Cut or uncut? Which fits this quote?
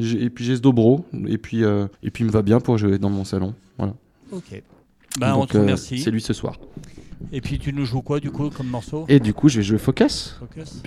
cut